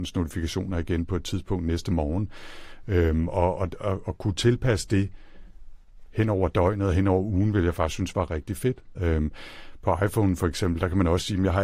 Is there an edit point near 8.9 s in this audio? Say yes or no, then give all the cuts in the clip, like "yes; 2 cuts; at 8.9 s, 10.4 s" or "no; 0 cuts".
yes; 1 cut; at 8.9 s